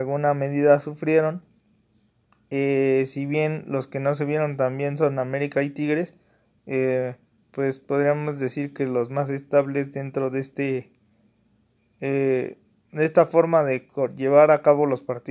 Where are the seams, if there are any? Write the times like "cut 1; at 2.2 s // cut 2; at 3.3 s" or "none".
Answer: none